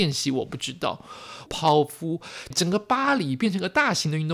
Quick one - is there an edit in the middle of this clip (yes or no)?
yes